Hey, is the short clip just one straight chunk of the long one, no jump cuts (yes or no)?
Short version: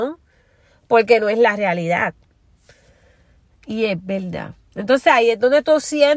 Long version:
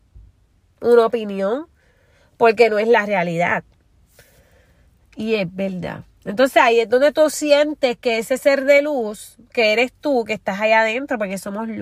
yes